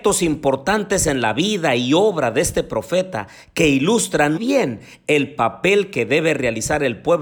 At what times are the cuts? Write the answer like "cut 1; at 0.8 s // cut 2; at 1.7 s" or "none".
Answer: cut 1; at 4.4 s